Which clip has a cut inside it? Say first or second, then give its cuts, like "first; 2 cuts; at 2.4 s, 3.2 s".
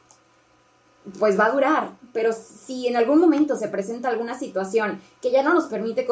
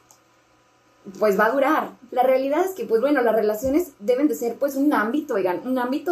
second; 1 cut; at 2.1 s